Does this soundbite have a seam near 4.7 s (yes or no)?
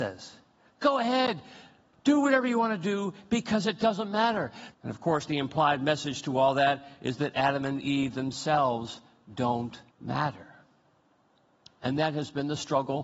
yes